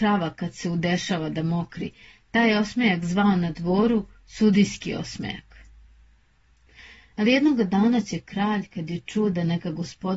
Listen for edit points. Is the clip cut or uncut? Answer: uncut